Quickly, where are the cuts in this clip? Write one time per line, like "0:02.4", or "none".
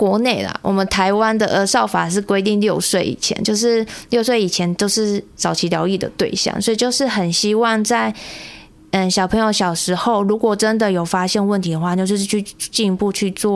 none